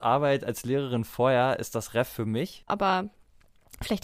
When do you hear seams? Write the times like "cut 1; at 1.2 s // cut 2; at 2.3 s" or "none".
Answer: cut 1; at 2.7 s